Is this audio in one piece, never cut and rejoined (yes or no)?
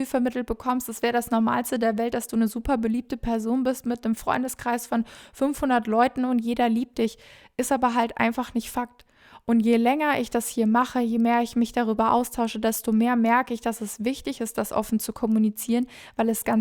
yes